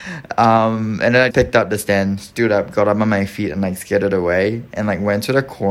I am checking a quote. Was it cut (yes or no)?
yes